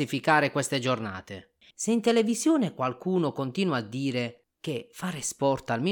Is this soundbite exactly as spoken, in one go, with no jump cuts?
no; 1 cut; at 1.7 s

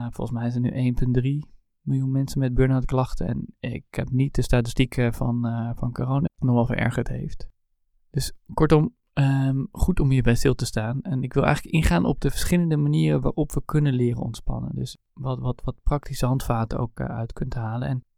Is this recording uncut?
no; 1 cut; at 6.3 s

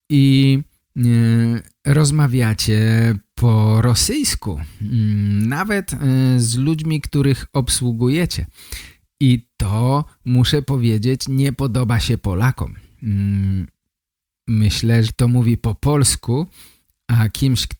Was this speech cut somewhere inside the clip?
yes; 1 cut; at 15.1 s

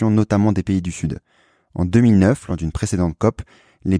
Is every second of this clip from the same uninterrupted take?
yes; 0 cuts

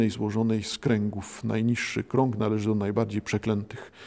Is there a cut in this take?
no; 0 cuts

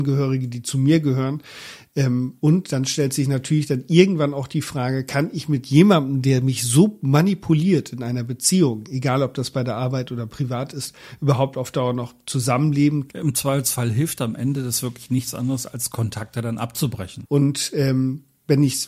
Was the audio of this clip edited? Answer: yes; 2 cuts; at 13.1 s, 17.2 s

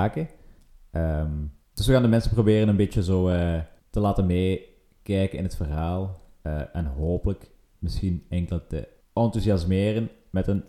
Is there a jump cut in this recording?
no; 0 cuts

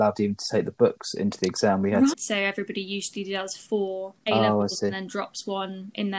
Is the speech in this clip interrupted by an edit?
yes; 2 cuts; at 2.1 s, 4.2 s

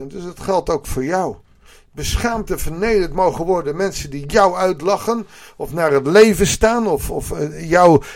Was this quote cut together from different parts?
no; 0 cuts

